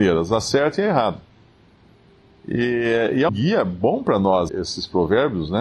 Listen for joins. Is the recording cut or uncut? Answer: cut